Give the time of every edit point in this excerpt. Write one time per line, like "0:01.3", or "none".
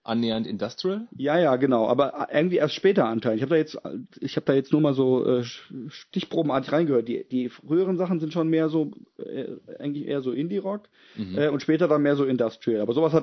none